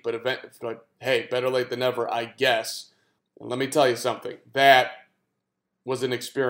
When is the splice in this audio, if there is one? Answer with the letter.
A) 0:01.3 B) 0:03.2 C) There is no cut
B